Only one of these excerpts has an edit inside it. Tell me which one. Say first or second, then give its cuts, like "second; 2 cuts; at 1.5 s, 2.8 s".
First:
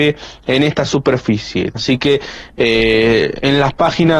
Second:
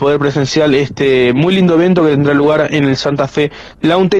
first; 1 cut; at 1.8 s